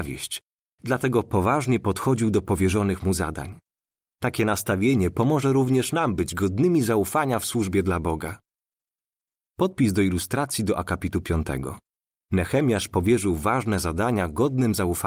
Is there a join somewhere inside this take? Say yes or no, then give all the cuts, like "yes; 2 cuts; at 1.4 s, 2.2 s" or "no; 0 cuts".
no; 0 cuts